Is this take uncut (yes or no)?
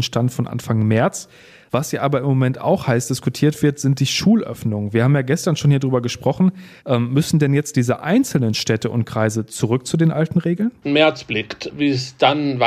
no